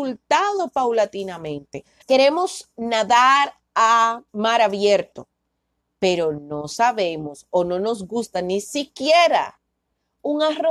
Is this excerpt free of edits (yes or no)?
no